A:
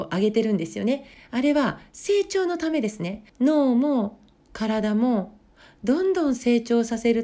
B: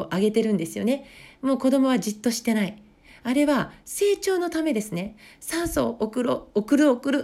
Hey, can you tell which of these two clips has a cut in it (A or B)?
A